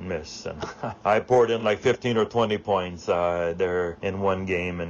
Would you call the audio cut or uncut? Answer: uncut